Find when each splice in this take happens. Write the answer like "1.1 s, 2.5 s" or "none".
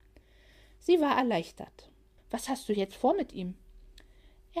2.2 s